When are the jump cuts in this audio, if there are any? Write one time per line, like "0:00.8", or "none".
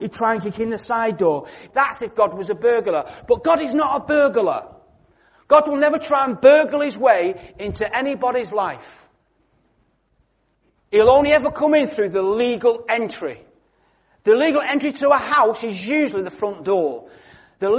0:01.7